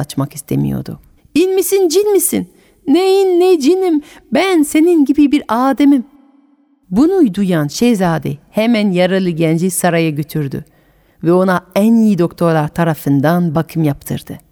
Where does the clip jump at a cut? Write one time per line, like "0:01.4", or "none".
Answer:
0:01.2